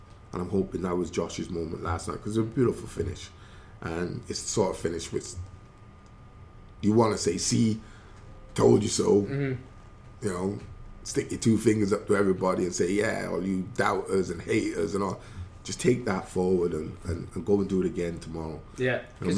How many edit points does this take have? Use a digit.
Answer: 2